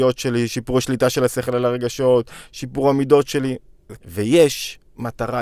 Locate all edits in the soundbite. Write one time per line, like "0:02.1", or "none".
0:04.0